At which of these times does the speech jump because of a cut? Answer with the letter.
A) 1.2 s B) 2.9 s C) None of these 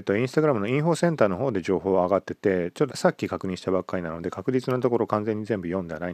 B